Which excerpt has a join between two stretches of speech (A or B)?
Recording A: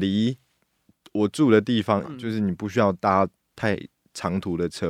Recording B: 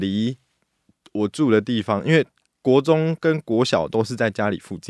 A